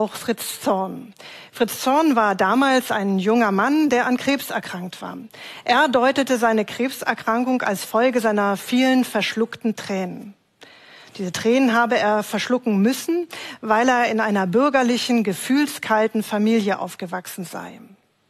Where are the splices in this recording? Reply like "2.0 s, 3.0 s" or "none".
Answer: none